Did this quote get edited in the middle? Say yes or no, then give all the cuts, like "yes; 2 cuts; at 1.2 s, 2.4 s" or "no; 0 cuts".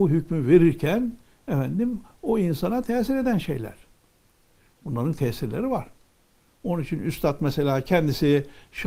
no; 0 cuts